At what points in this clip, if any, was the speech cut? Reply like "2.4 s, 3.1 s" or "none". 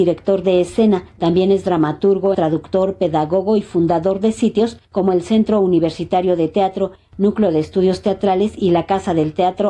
2.3 s